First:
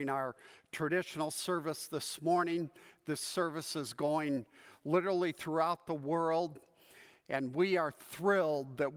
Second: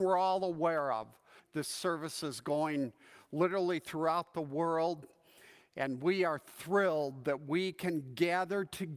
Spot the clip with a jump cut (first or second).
second